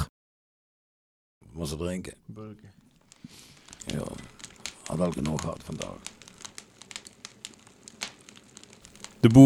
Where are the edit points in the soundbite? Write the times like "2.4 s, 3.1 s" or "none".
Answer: 1.4 s, 3.8 s